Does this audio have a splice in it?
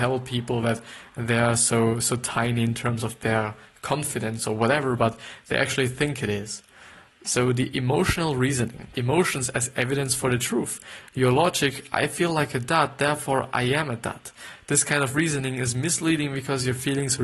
yes; 1 cut; at 8.9 s

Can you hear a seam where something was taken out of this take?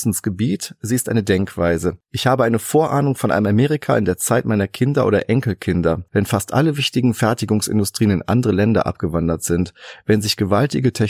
yes; 1 cut; at 6.1 s

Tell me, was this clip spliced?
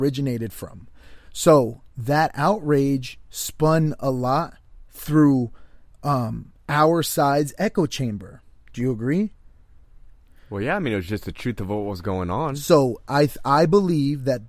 no; 0 cuts

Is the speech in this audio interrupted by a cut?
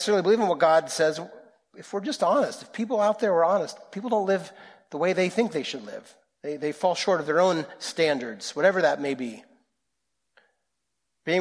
no; 0 cuts

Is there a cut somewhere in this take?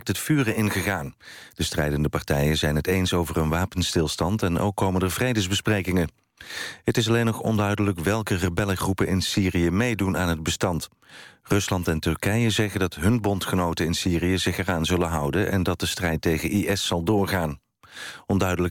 no; 0 cuts

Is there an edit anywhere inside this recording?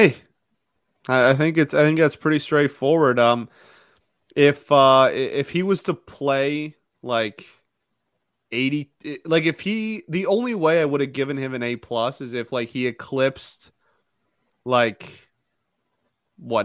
no; 0 cuts

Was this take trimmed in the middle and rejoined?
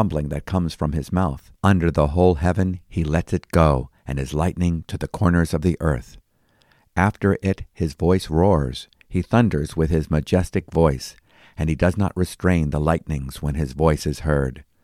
yes; 1 cut; at 1.6 s

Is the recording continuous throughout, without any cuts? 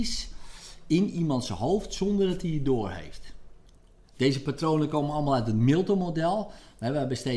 yes; 0 cuts

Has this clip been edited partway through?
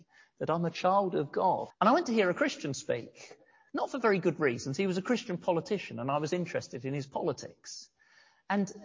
yes; 1 cut; at 1.7 s

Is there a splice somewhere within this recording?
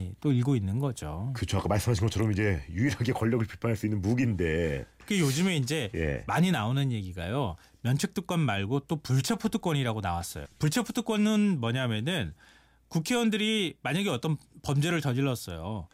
yes; 1 cut; at 10.4 s

